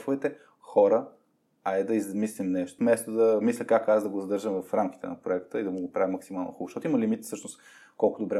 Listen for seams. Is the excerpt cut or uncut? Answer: cut